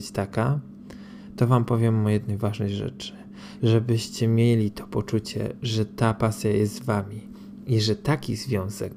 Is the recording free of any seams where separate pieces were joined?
no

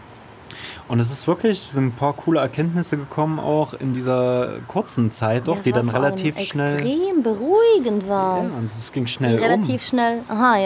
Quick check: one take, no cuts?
yes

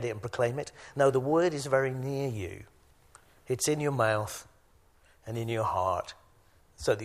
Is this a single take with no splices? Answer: yes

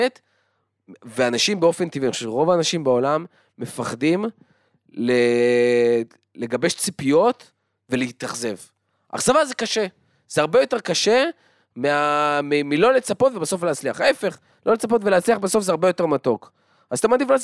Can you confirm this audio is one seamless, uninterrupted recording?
yes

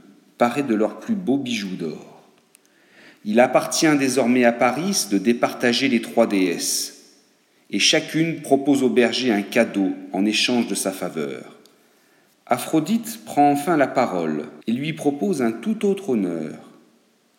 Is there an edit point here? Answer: yes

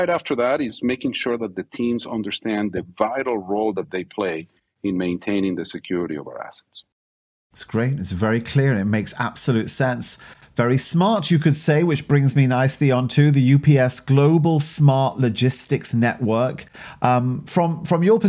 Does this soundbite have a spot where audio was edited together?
no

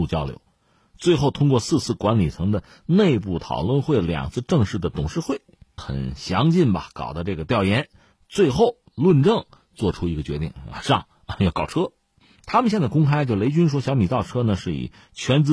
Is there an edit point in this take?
yes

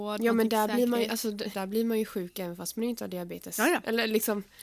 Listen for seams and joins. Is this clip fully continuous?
no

